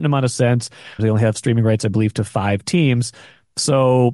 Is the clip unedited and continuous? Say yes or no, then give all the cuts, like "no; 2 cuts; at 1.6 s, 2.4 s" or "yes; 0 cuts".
no; 1 cut; at 1.0 s